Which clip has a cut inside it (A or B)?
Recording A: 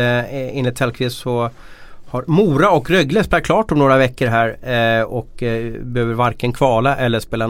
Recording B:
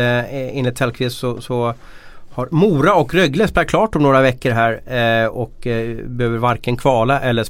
A